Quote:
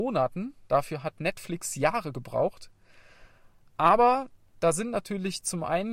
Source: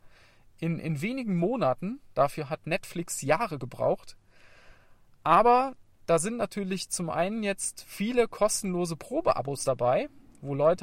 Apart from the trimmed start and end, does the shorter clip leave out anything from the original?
no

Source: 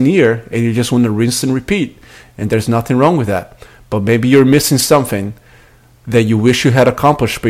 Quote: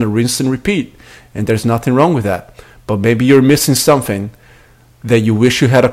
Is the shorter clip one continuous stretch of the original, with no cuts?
yes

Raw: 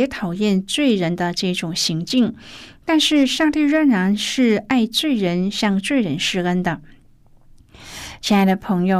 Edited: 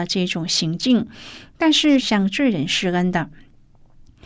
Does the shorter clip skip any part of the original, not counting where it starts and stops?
yes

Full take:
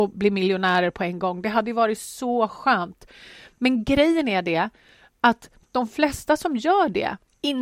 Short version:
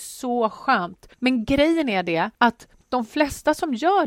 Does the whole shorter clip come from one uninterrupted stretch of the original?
no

